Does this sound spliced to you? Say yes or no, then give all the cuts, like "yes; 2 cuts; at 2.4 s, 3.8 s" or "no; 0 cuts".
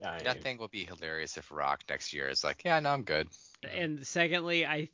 yes; 1 cut; at 3.6 s